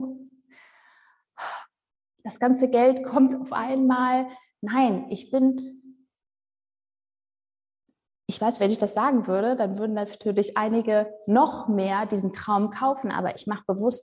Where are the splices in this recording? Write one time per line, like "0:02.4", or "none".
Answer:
0:08.6